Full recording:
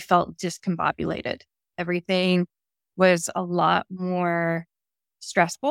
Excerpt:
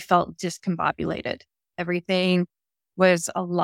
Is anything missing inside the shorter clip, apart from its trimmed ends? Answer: no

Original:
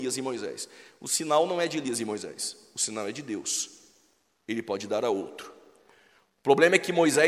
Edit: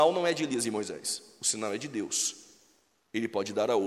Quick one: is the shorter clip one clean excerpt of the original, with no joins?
yes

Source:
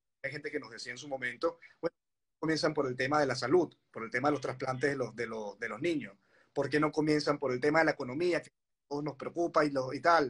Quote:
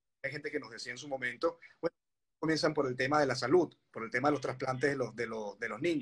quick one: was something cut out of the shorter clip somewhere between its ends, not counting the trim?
no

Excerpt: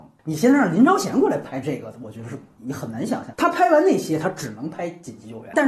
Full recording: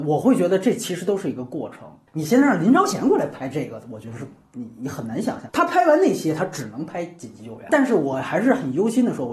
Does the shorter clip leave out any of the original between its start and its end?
yes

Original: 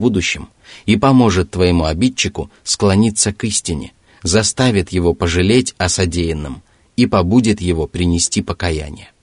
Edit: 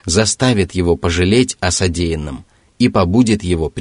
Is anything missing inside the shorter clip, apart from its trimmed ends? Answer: no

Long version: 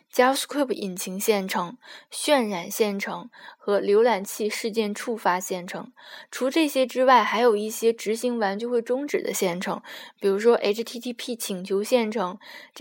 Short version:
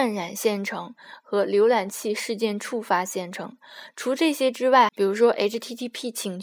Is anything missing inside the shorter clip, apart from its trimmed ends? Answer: yes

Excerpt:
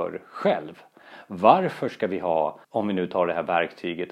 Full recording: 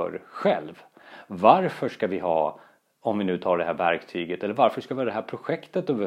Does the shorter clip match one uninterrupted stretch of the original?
no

